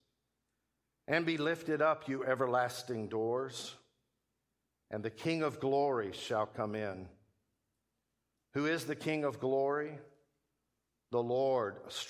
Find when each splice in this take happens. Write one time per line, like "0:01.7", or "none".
none

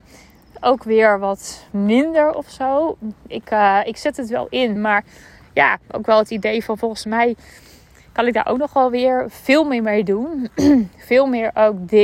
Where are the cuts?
none

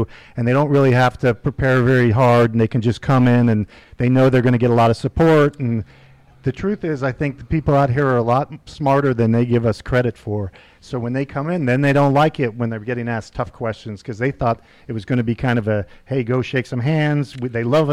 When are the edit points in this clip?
none

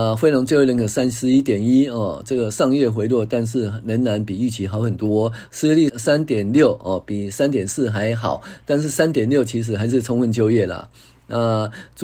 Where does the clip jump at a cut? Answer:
0:05.9

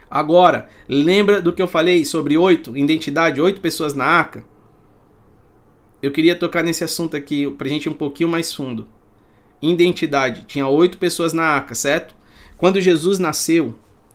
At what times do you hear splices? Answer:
none

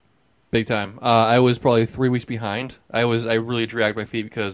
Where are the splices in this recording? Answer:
none

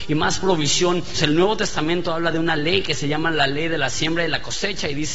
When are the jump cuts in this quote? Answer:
0:01.1

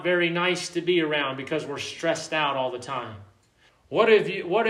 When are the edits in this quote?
0:03.7

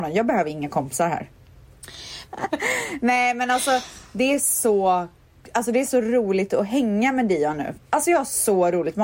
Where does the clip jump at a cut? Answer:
0:02.2
0:07.7

